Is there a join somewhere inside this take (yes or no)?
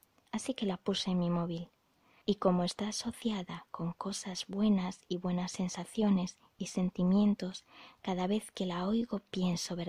yes